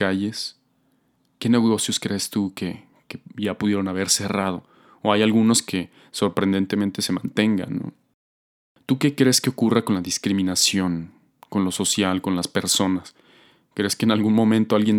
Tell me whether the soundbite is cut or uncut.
uncut